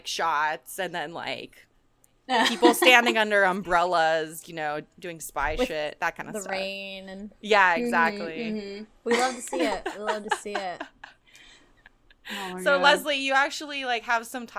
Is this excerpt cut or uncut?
uncut